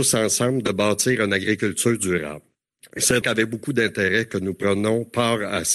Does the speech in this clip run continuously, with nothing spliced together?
no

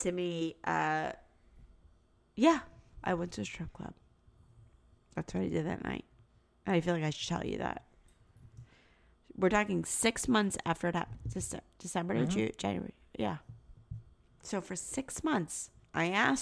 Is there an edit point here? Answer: no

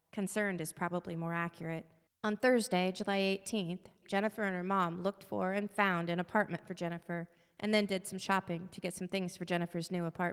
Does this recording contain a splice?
yes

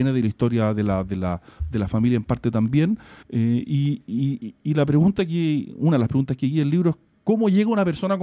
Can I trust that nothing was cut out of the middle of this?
no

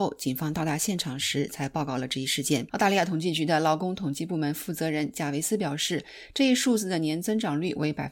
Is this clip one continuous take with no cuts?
no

